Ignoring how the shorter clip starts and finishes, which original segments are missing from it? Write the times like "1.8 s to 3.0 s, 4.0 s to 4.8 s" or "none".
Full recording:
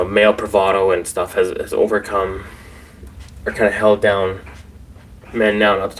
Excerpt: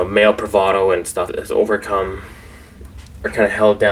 1.3 s to 1.5 s